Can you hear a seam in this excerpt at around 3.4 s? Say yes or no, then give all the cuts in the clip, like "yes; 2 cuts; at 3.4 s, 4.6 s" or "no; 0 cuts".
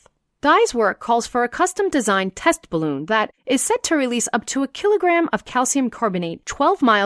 yes; 1 cut; at 3.4 s